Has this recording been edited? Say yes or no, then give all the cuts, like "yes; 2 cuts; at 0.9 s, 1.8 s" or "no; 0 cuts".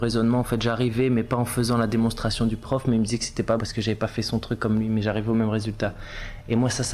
yes; 1 cut; at 3.6 s